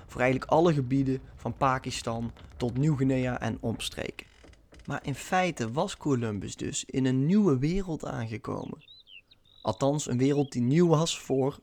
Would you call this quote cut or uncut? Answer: uncut